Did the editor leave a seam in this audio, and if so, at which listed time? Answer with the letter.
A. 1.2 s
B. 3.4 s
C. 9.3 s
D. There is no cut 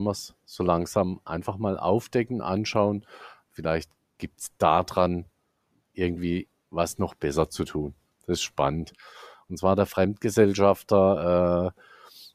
C